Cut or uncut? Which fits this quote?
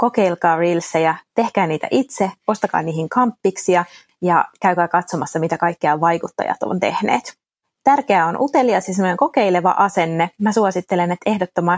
cut